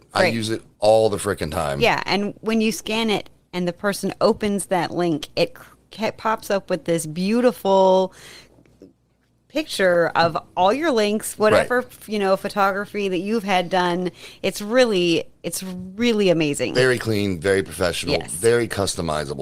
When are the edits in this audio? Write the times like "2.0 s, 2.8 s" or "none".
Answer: none